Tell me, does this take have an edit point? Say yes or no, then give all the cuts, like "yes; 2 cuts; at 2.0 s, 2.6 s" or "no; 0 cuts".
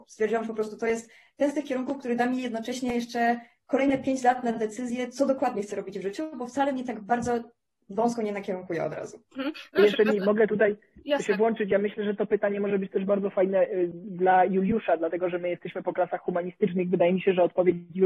yes; 1 cut; at 9.3 s